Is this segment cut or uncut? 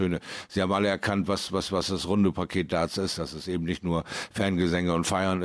uncut